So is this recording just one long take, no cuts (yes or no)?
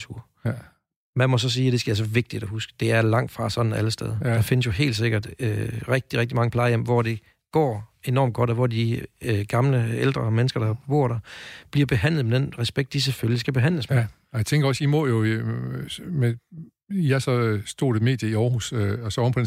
yes